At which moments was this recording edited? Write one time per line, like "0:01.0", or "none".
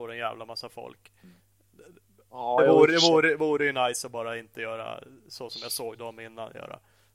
none